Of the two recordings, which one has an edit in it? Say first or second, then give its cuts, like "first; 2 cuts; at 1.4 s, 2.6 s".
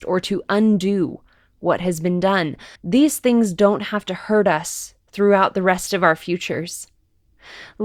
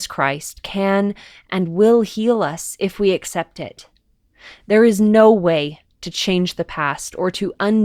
first; 1 cut; at 2.7 s